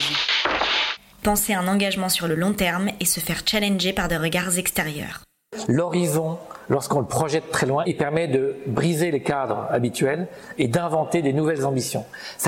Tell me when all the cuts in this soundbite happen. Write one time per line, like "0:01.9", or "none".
0:05.7
0:07.9

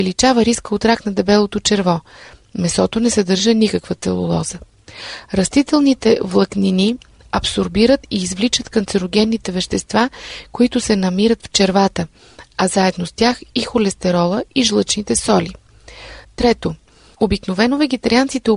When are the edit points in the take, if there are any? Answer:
none

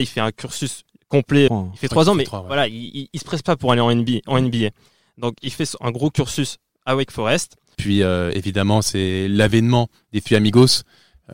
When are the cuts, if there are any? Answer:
0:01.5
0:07.7

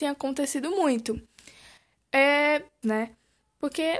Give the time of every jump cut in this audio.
0:02.8

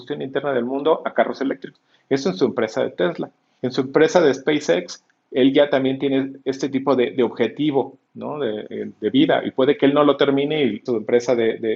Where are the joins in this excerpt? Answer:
0:10.9

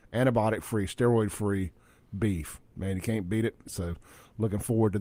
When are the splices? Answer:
0:03.7

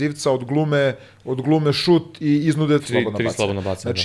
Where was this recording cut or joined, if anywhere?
0:02.8

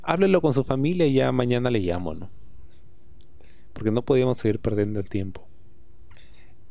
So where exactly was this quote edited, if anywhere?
none

